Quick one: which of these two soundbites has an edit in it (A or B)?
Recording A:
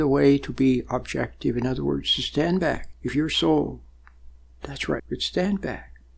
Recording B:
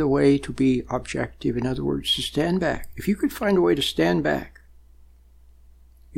A